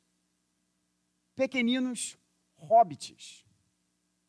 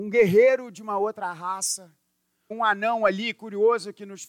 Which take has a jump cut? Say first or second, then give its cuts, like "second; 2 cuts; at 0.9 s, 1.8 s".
second; 1 cut; at 2.5 s